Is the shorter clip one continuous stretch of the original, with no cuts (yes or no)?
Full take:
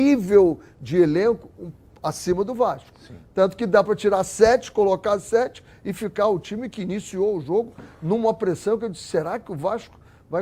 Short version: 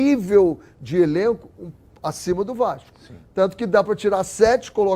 yes